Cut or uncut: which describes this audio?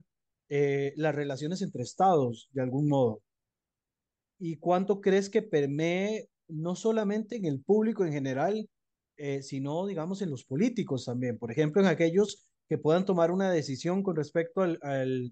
cut